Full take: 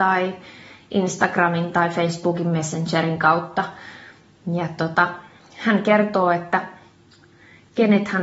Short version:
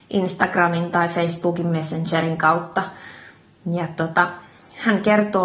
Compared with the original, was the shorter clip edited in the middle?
no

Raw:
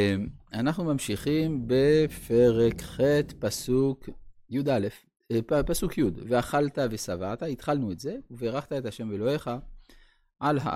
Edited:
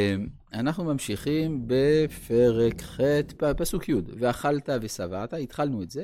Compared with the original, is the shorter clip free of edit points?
no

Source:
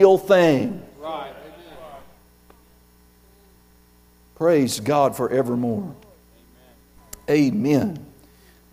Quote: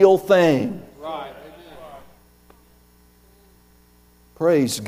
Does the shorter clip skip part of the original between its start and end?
no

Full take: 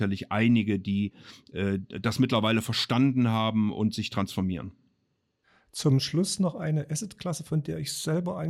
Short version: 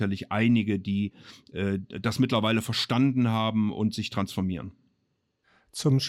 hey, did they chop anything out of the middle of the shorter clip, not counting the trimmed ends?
no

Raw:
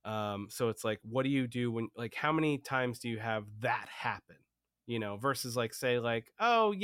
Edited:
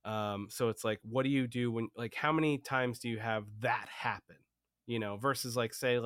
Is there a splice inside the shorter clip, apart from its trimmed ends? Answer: no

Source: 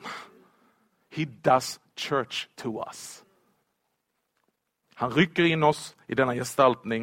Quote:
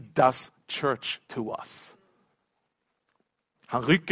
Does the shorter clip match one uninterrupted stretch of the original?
yes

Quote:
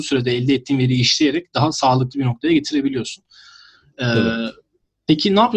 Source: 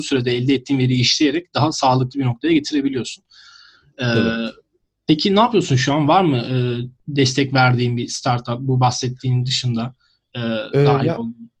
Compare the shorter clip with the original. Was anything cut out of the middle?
no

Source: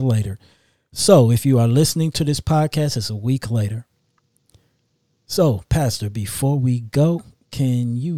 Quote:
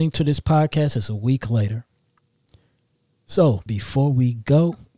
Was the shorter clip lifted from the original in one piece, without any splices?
no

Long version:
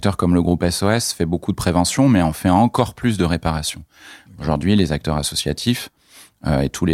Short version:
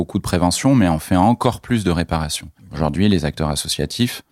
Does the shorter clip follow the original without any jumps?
no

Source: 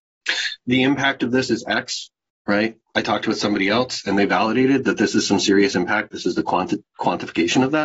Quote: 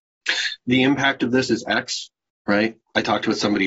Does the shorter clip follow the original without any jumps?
yes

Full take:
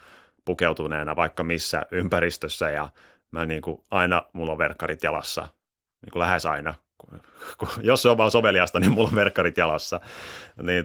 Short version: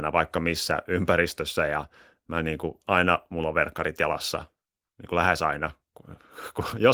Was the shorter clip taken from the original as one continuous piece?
yes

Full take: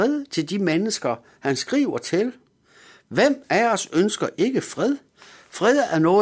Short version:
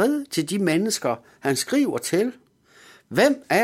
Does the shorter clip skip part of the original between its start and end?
no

